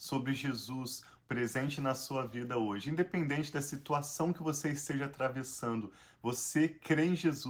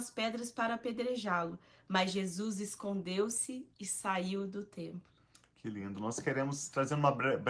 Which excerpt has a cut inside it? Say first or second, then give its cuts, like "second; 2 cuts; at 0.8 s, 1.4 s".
first; 1 cut; at 1.2 s